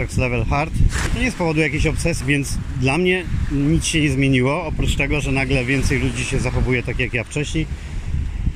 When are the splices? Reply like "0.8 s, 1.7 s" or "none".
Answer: 1.1 s, 2.2 s